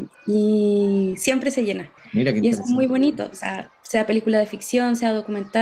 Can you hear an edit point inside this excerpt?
yes; 1 cut; at 2.0 s

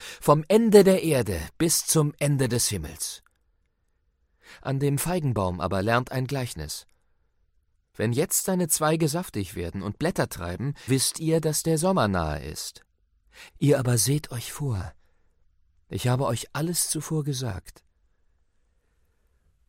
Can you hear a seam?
yes; 2 cuts; at 10.9 s, 13.5 s

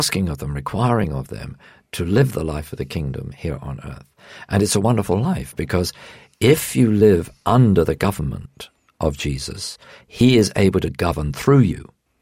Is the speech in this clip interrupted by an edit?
no; 0 cuts

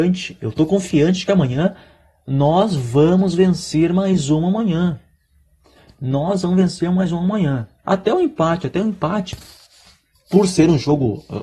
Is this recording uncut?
no; 1 cut; at 7.8 s

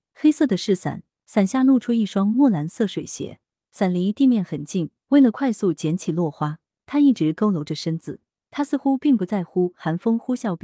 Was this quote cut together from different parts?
no; 0 cuts

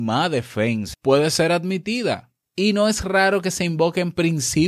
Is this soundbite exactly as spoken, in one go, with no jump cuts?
no; 2 cuts; at 0.9 s, 2.4 s

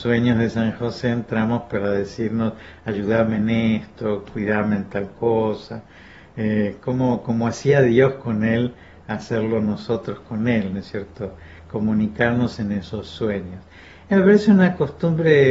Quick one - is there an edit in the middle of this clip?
no; 0 cuts

